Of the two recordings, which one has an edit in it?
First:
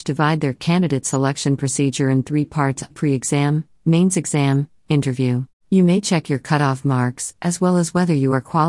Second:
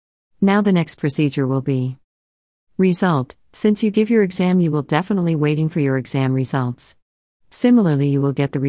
first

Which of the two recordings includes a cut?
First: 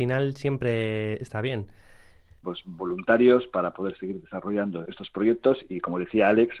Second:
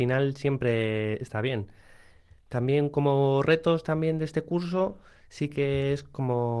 first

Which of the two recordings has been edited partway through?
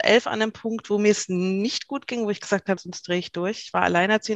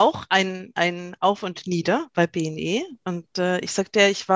first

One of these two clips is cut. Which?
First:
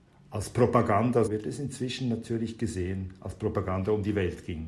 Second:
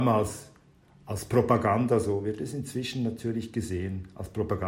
first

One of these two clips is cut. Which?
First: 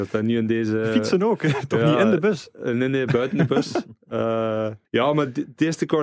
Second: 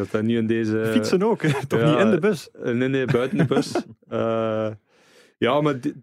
first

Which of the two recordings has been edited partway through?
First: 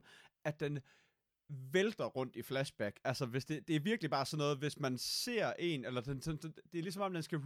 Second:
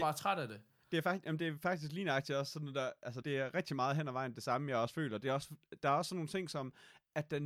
second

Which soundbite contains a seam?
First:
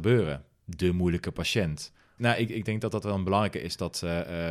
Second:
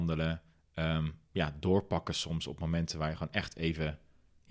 first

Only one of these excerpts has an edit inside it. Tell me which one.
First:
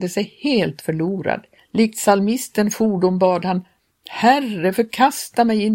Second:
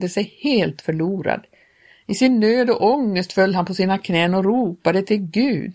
first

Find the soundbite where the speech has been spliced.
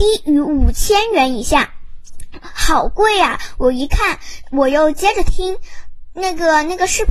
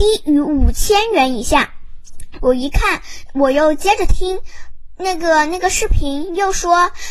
second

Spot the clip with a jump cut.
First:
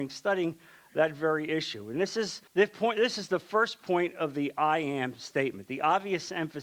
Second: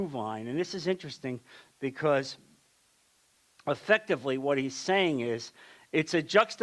first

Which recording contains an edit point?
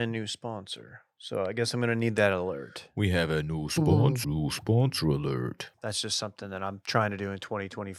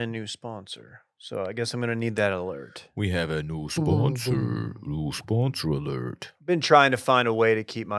first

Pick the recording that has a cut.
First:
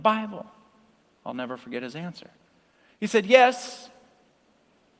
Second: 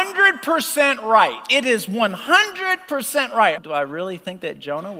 second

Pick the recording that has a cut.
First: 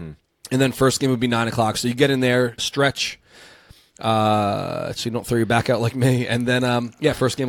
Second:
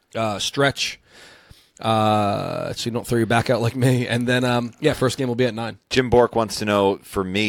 first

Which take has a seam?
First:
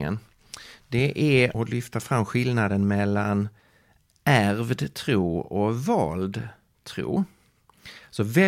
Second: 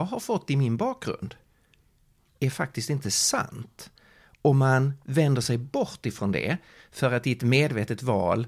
first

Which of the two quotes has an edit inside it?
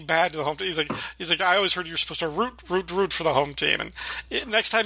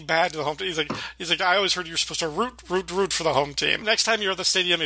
second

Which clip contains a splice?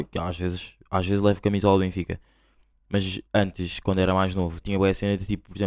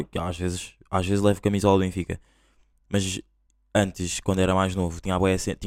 first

